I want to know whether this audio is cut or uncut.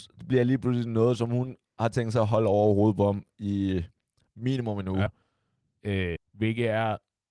cut